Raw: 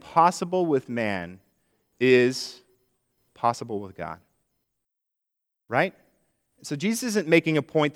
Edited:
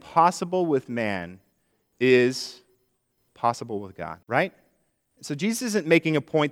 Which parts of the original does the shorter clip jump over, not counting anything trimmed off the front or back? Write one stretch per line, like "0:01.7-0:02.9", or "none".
0:04.2-0:05.6